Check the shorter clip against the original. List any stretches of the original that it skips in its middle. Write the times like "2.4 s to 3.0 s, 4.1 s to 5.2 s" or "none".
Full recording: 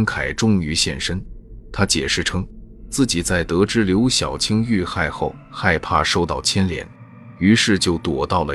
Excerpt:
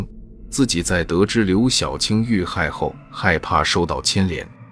none